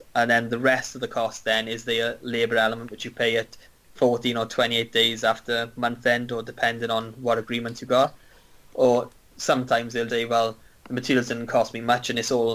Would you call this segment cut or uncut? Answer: cut